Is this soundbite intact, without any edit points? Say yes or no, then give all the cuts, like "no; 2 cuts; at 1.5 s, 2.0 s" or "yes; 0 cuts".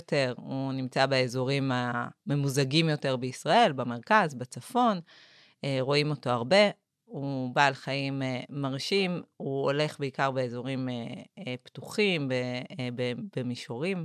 yes; 0 cuts